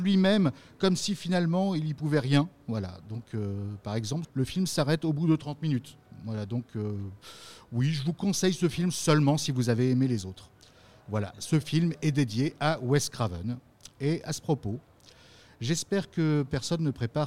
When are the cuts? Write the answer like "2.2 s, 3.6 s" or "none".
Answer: 4.2 s